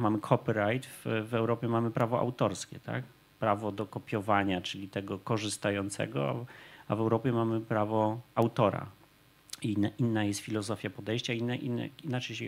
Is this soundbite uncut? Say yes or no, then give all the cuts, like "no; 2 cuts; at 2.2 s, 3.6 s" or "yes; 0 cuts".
yes; 0 cuts